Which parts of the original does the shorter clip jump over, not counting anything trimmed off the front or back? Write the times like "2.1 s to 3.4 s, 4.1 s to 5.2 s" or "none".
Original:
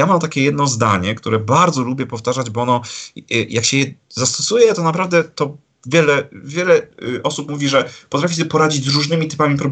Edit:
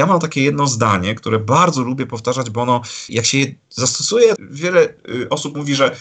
3.1 s to 3.5 s, 4.8 s to 6.3 s